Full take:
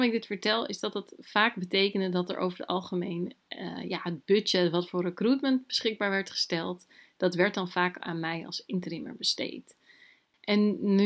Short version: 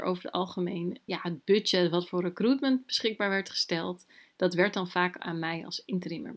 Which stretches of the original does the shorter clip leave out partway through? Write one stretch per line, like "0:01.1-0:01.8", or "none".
0:03.4-0:03.9